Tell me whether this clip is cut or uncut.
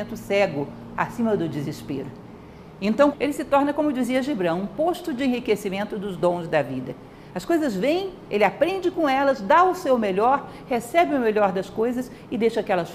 cut